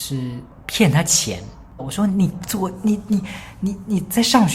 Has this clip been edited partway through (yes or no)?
yes